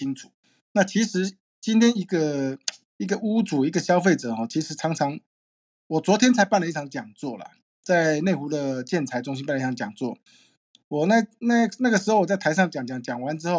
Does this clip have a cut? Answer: no; 0 cuts

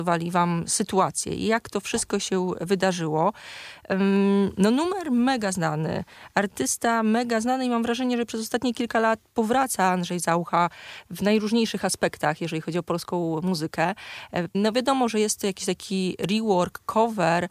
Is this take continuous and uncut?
no; 1 cut; at 14.5 s

